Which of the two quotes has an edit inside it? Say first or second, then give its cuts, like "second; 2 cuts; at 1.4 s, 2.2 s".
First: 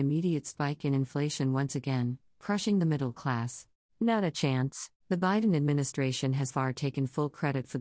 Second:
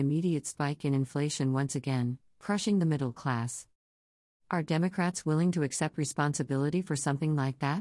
first; 3 cuts; at 3.9 s, 5.0 s, 6.5 s